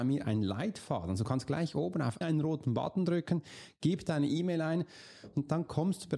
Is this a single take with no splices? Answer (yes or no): no